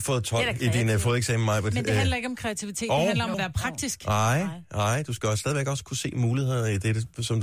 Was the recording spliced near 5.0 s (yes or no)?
no